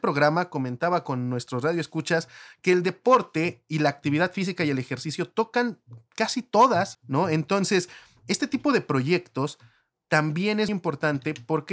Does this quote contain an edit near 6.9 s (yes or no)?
yes